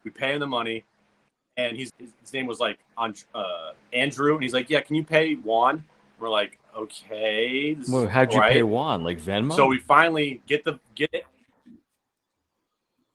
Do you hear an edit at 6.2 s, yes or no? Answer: no